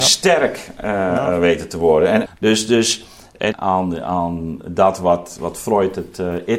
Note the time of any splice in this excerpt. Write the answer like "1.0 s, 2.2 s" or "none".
2.3 s, 3.5 s, 5.4 s

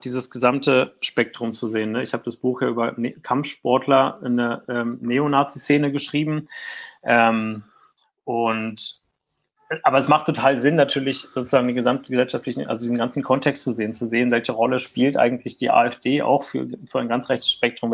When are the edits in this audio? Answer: none

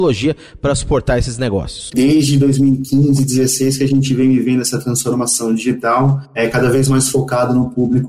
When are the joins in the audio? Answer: 1.9 s

